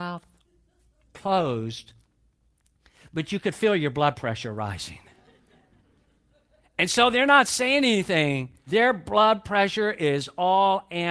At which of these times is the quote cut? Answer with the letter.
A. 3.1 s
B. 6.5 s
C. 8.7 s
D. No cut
C